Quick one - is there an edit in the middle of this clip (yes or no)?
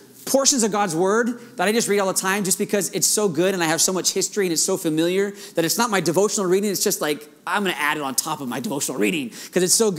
no